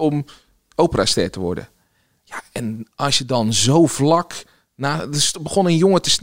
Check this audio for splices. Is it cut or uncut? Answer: uncut